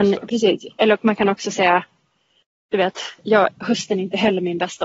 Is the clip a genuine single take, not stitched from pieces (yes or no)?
yes